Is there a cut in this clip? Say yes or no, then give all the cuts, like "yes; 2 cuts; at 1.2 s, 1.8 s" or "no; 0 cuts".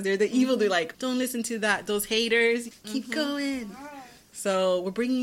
yes; 2 cuts; at 0.9 s, 2.7 s